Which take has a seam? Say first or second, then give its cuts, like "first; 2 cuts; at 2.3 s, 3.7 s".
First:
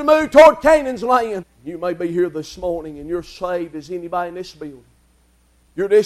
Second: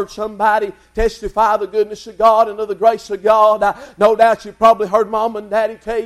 first; 1 cut; at 1.4 s